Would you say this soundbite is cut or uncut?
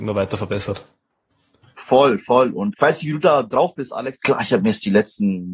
cut